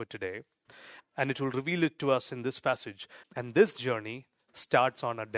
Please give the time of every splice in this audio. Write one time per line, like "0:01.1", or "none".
0:01.0
0:03.2